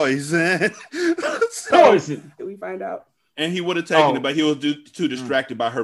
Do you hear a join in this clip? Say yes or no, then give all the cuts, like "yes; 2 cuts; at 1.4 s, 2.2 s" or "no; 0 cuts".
yes; 1 cut; at 2.4 s